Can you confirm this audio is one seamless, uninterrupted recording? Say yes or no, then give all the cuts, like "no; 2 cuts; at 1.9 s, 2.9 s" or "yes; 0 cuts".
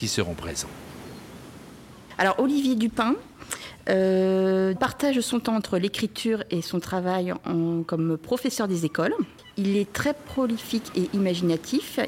no; 1 cut; at 4.7 s